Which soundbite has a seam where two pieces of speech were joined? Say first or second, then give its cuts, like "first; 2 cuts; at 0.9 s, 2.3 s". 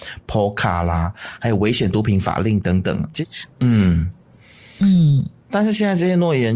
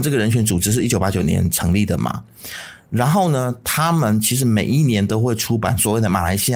first; 1 cut; at 3.5 s